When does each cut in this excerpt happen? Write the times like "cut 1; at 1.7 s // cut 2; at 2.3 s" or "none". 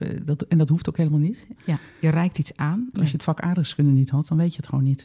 cut 1; at 1.6 s // cut 2; at 2.9 s